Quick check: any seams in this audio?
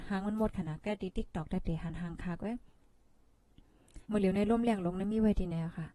yes; 1 cut; at 4.0 s

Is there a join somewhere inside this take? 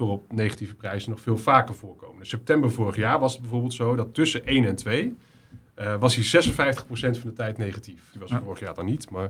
yes; 1 cut; at 8.1 s

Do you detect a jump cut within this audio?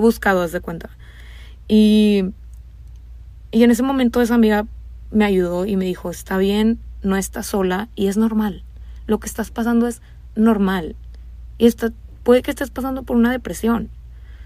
no; 0 cuts

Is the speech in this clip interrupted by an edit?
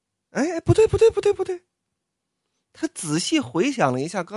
no; 0 cuts

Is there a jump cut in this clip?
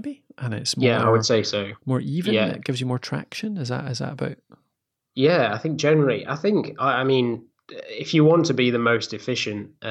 no; 0 cuts

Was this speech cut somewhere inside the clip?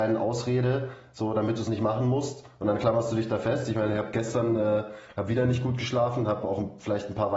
no; 0 cuts

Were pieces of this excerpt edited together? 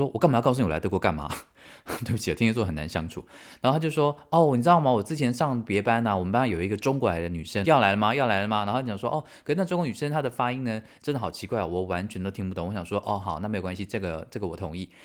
yes; 1 cut; at 7.6 s

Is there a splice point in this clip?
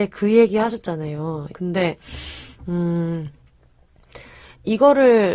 yes; 1 cut; at 1.5 s

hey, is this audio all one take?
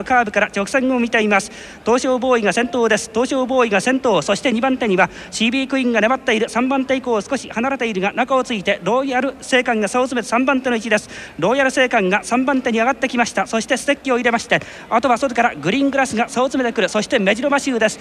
yes; 0 cuts

